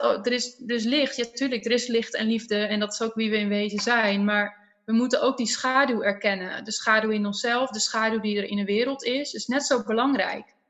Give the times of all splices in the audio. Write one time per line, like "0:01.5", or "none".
none